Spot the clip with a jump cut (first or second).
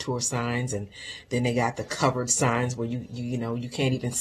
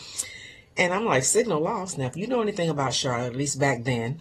second